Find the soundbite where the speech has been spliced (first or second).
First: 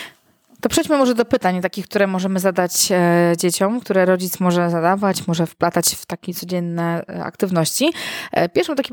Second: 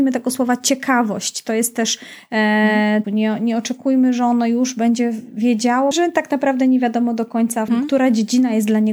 second